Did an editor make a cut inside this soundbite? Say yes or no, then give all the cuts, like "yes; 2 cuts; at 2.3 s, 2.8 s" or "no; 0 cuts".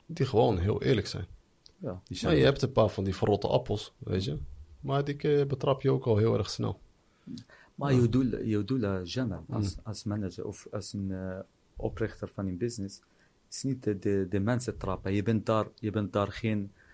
no; 0 cuts